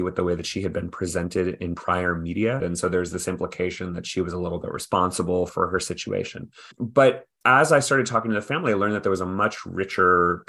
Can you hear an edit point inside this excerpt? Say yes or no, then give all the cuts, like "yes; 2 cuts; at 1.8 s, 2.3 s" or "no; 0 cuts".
yes; 1 cut; at 2.6 s